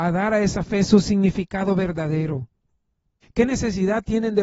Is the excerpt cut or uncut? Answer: cut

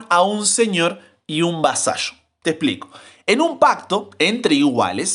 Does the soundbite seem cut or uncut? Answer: uncut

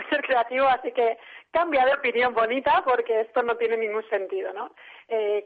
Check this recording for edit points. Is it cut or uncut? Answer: uncut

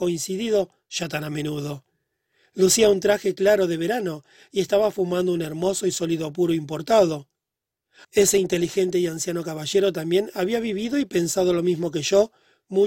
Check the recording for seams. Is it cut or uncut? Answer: cut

